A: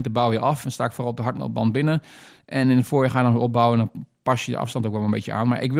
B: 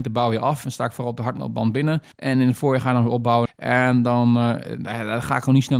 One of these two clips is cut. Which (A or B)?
B